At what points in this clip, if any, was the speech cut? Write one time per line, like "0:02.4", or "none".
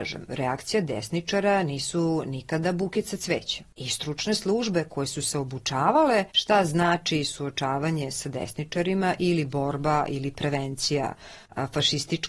0:06.3